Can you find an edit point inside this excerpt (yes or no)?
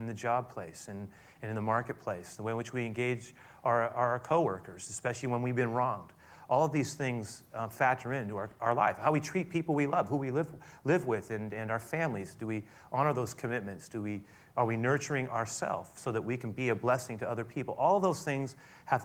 no